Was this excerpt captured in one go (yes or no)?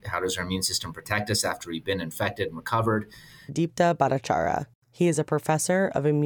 no